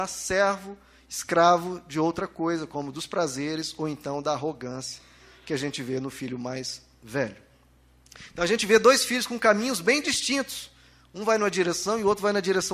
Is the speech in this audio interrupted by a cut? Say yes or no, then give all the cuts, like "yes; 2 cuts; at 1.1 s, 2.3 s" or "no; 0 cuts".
no; 0 cuts